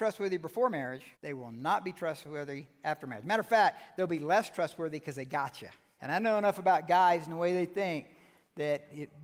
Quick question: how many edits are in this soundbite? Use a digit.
1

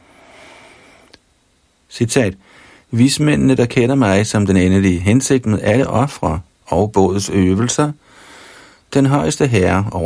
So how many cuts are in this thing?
0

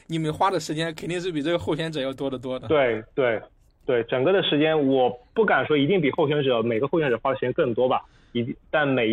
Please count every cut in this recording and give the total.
0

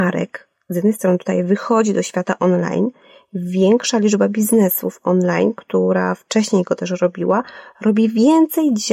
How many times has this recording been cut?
0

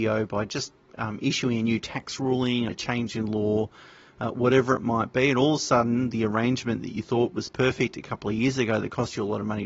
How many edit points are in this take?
1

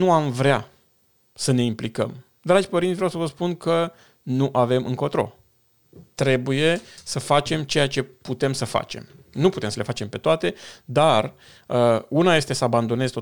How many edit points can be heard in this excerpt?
1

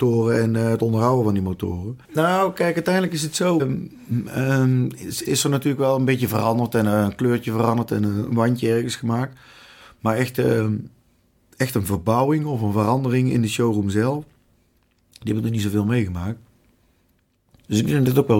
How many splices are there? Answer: 3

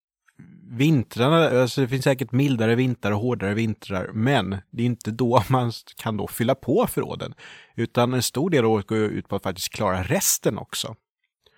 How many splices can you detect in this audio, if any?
0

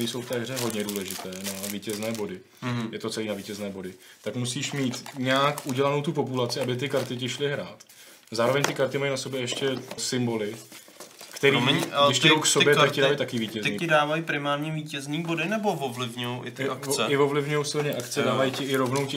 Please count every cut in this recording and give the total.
2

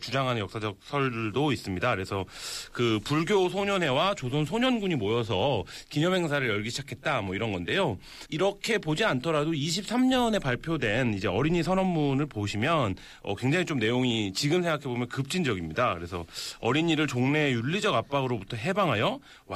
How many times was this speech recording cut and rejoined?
1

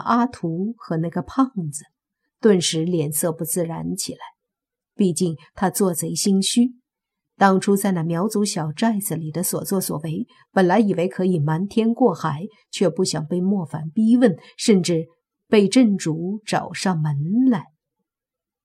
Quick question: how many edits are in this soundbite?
0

